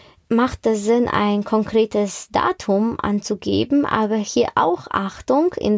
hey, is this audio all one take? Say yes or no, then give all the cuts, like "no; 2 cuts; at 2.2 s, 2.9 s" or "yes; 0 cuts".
yes; 0 cuts